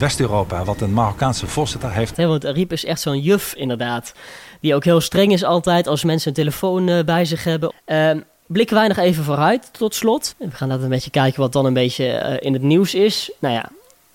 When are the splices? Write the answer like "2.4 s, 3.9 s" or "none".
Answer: 2.1 s, 7.7 s, 10.3 s